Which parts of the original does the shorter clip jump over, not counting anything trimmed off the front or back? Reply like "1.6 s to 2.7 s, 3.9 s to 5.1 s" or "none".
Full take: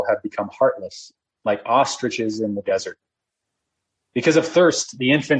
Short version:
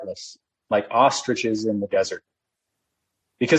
none